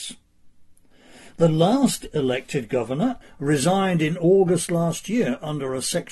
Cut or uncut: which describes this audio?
cut